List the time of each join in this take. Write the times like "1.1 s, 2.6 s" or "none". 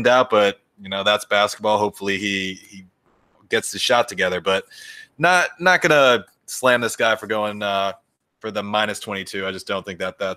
none